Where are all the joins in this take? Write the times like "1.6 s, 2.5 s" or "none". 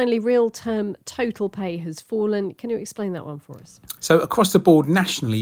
4.0 s